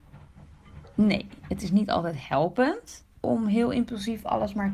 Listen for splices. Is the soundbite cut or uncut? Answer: cut